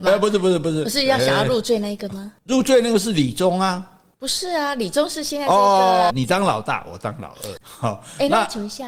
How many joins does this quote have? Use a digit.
2